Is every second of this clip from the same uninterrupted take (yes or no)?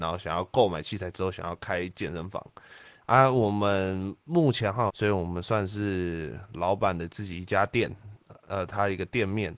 no